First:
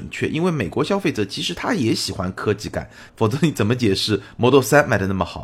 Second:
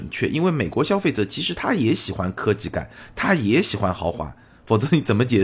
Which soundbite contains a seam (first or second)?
first